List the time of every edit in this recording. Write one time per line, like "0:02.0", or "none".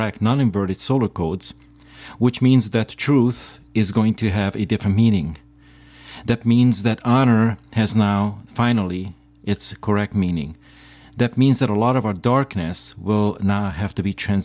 none

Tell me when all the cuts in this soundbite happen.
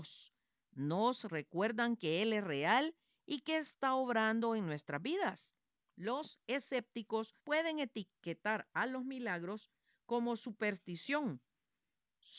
0:05.8
0:07.4

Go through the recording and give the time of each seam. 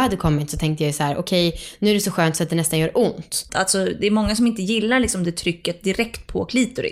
0:03.5

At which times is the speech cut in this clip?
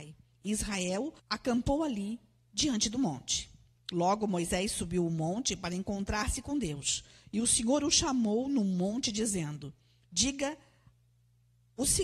0:01.2

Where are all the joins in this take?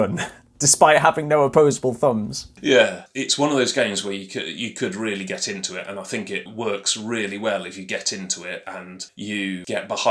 none

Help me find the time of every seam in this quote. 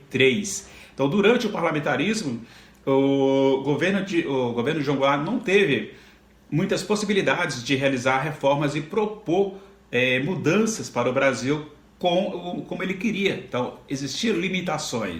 none

